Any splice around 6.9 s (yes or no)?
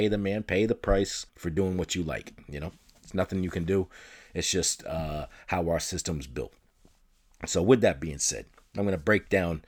no